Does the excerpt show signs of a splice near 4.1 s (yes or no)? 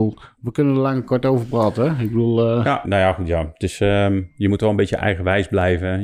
no